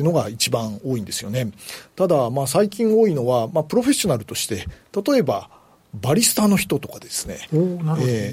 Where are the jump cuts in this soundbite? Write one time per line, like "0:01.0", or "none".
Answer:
none